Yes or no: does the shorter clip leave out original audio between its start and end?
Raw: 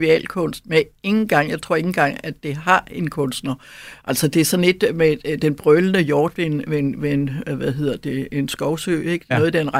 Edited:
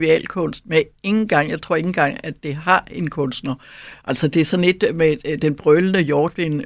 no